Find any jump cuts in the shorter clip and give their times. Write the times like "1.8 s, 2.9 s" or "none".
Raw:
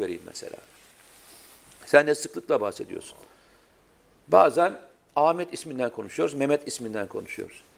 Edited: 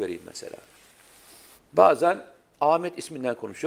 1.6 s